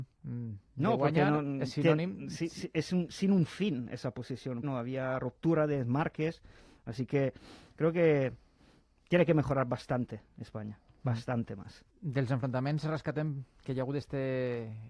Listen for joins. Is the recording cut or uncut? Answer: cut